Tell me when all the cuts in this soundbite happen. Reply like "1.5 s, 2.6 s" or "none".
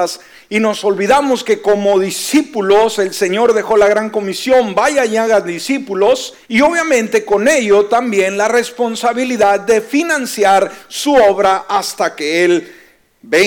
6.4 s